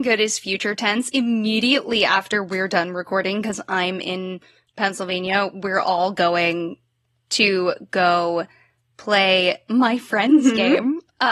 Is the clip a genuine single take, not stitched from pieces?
yes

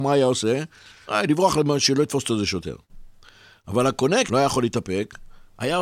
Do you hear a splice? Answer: yes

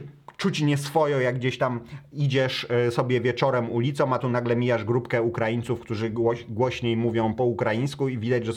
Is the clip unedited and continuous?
yes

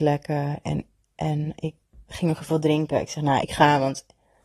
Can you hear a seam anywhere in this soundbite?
yes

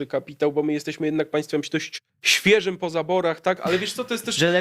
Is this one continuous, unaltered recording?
no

